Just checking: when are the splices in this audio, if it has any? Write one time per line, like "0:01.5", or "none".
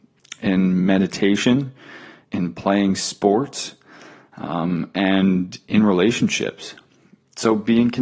0:02.2